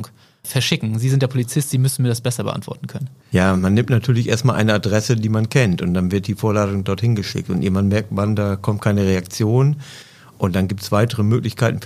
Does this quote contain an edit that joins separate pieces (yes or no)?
no